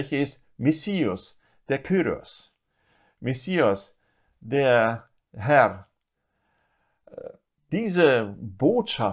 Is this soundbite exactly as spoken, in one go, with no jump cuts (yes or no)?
yes